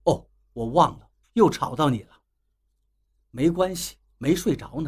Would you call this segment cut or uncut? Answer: cut